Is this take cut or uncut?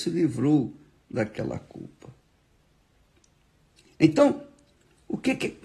uncut